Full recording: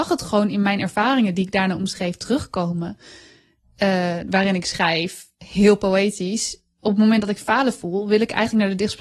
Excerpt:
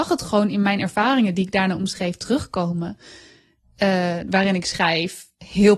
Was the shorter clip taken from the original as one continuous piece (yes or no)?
yes